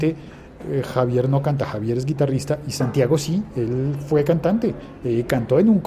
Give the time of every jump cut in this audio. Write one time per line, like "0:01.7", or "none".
none

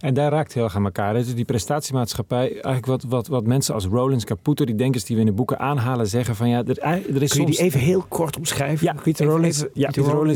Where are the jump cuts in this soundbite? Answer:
none

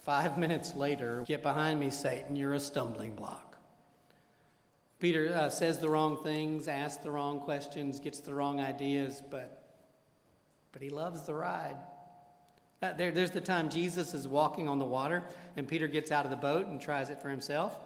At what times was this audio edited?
0:01.2

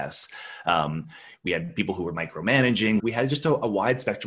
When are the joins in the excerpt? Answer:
0:03.0

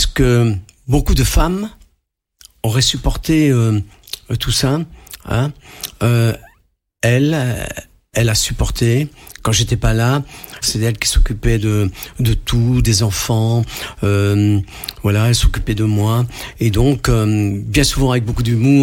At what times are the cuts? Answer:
0:10.6

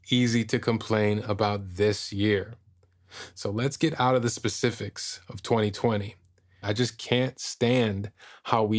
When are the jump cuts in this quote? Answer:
0:06.6

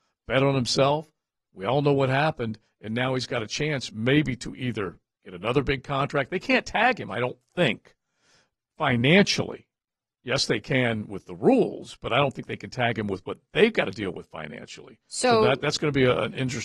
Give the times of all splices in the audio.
none

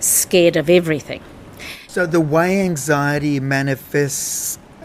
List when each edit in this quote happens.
0:01.9

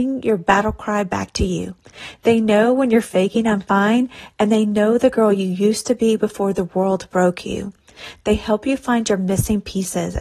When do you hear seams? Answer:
none

